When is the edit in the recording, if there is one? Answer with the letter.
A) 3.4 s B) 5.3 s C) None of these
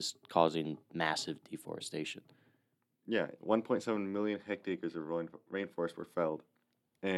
A